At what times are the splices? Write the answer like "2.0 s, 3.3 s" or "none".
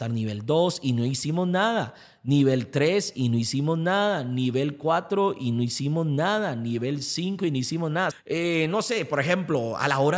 8.1 s